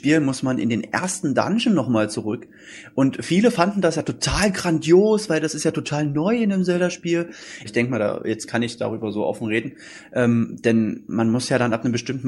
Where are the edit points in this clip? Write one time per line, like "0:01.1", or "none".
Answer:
0:07.6